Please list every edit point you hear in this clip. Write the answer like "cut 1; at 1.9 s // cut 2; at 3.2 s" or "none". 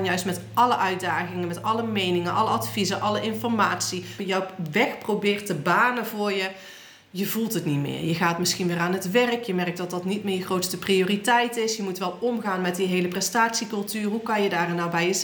cut 1; at 4.2 s